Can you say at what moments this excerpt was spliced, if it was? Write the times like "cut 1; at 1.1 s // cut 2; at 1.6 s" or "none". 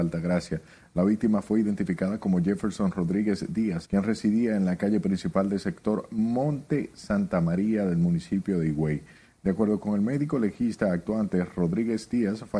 cut 1; at 3.8 s